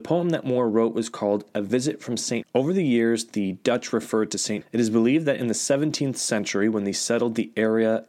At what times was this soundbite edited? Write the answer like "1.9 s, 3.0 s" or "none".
2.4 s, 4.6 s

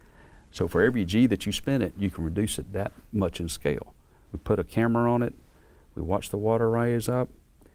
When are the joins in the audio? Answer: 4.3 s

